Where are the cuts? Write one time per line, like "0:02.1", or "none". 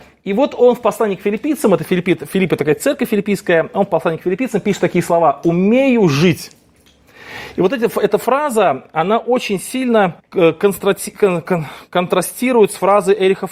0:10.2